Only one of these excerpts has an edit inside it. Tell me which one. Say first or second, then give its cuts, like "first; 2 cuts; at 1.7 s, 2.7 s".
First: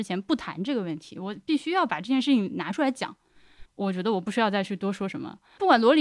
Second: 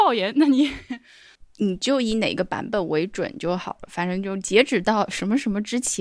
first; 1 cut; at 3.6 s